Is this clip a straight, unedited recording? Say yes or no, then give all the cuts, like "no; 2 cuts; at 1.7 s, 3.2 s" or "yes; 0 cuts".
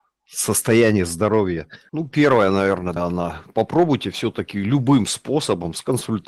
no; 2 cuts; at 1.9 s, 3.0 s